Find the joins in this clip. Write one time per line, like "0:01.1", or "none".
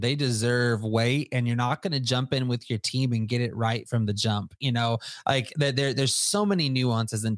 none